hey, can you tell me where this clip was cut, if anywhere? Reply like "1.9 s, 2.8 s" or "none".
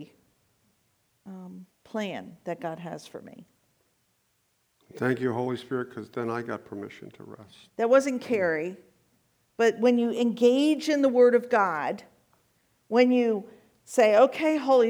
7.7 s